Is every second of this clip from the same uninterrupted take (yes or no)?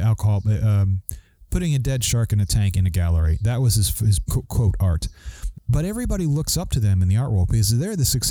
no